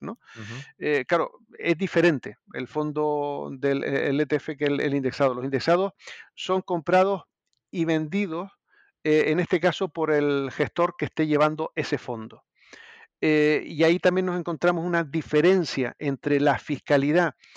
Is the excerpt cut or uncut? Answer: uncut